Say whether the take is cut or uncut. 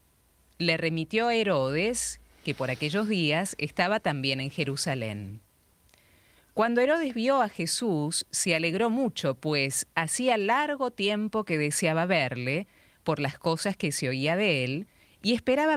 uncut